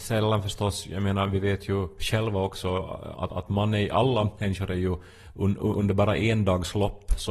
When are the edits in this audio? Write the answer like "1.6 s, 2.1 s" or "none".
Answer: 3.1 s